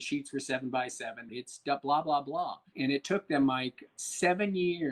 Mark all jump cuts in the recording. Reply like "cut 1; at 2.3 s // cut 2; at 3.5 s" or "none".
cut 1; at 1.3 s // cut 2; at 2.7 s // cut 3; at 3.9 s